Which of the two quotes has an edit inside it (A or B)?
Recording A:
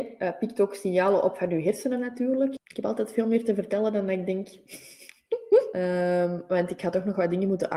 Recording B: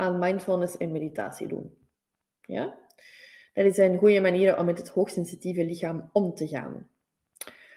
A